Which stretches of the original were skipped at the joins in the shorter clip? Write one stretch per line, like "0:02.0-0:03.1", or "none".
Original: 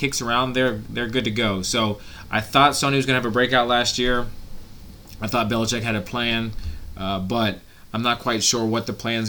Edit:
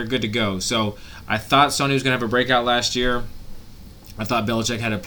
none